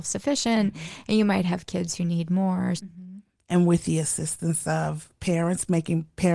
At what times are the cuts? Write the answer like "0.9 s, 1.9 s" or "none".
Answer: 2.8 s